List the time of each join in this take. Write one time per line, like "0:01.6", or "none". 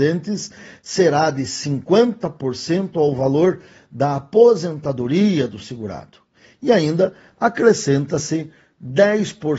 none